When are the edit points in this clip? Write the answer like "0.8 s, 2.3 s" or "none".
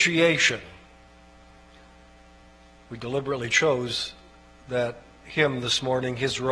none